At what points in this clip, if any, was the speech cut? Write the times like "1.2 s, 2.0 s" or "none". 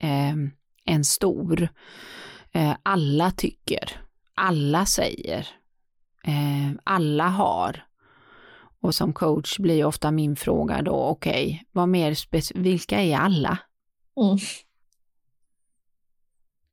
8.9 s